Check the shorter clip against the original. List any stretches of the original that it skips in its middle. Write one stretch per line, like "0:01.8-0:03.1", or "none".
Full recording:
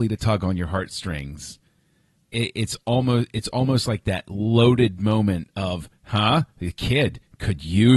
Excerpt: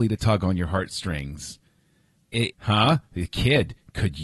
0:02.5-0:06.0